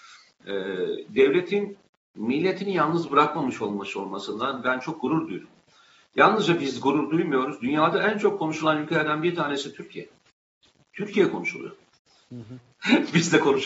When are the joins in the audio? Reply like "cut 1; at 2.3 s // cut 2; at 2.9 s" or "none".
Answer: cut 1; at 10.9 s // cut 2; at 12.7 s